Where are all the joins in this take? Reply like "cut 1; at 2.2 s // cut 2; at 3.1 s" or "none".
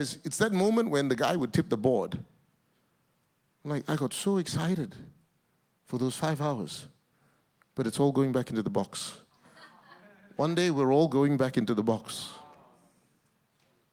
none